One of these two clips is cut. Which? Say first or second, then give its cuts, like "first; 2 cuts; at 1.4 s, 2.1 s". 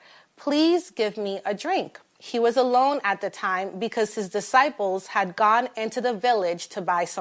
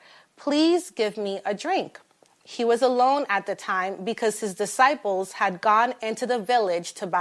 first; 1 cut; at 2.1 s